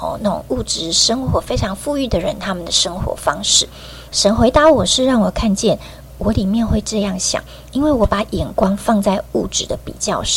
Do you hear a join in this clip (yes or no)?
yes